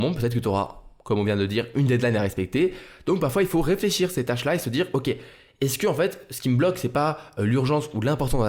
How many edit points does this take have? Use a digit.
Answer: 0